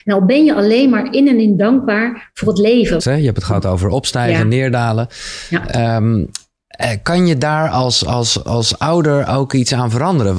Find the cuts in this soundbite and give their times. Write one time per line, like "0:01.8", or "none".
0:03.0